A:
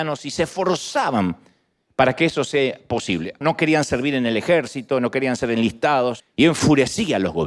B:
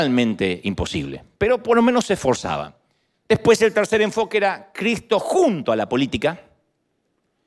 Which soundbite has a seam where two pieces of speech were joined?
A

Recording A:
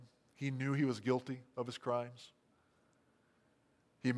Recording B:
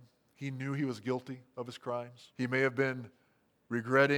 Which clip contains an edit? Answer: B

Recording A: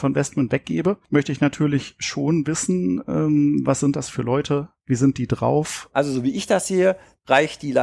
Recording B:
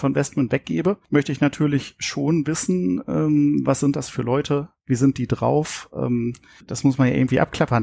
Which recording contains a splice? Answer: A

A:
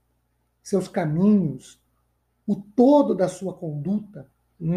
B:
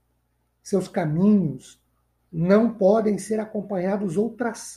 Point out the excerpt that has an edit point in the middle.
B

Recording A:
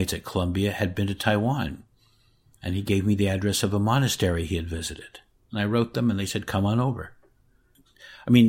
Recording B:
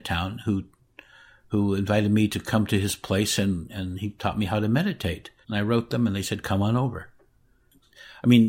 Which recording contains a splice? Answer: B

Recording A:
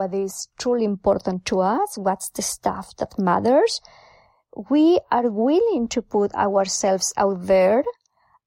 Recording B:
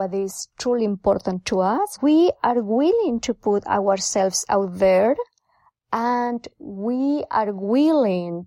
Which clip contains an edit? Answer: B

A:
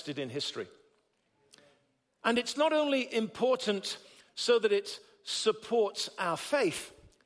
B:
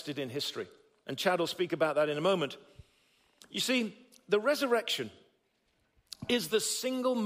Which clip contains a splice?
B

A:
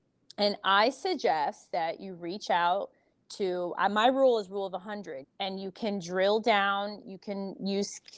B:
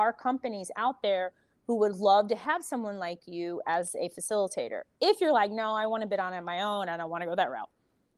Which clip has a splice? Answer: A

